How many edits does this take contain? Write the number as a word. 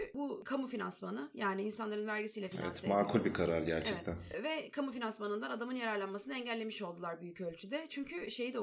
zero